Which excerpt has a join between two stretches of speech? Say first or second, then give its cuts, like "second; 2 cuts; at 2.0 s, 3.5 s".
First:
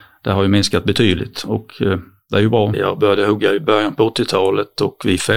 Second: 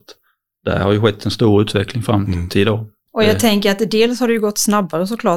first; 1 cut; at 2.7 s